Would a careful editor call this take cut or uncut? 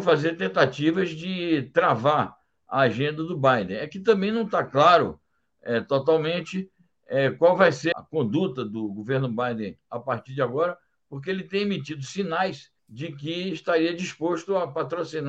cut